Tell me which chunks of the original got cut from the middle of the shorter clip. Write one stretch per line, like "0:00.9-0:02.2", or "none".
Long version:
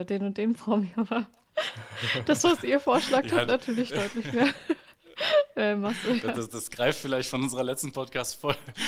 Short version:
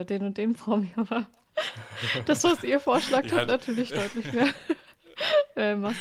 none